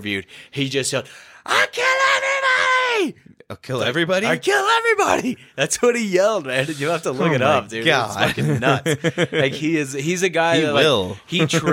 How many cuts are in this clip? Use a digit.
0